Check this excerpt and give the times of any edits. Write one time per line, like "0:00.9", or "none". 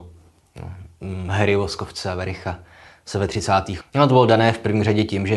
0:03.8